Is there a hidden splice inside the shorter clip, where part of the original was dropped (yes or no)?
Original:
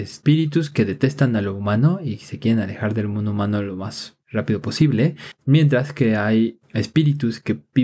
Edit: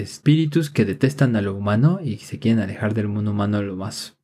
no